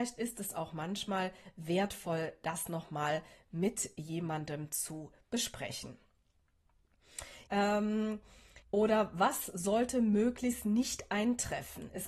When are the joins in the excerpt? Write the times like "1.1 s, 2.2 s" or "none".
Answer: 7.5 s, 8.6 s